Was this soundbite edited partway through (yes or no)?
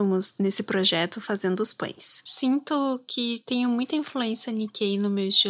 yes